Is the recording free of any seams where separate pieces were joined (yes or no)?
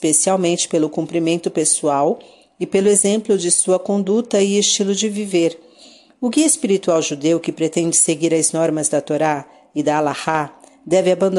yes